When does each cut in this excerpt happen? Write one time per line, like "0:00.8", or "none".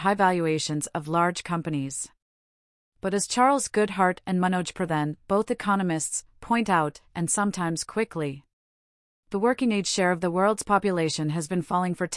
0:07.0

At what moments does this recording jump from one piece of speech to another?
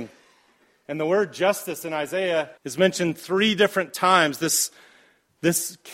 0:02.6

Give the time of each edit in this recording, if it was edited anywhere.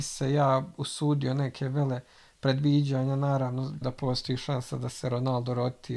0:03.8

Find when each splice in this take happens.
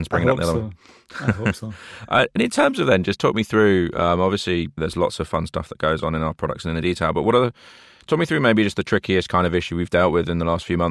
none

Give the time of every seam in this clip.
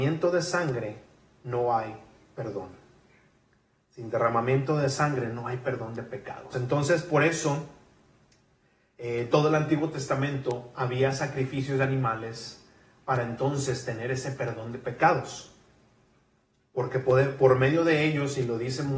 0:06.5

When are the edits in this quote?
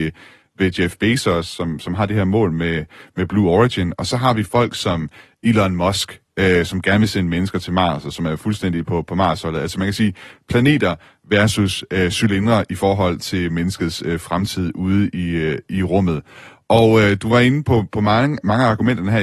none

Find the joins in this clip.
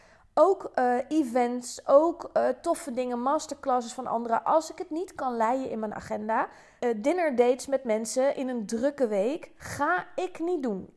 0:06.8

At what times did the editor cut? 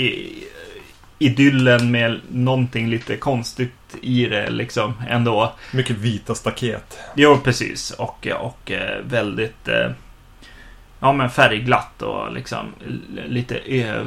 none

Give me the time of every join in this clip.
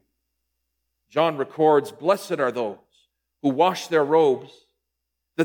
none

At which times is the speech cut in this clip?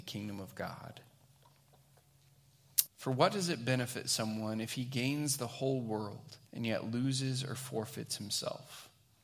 0:02.9
0:06.5

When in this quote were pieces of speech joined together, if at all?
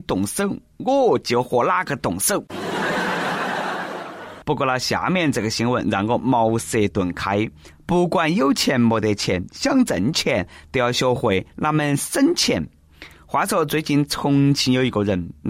none

